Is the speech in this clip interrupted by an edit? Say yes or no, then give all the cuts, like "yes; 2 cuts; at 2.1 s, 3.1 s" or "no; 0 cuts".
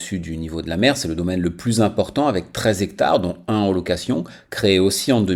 no; 0 cuts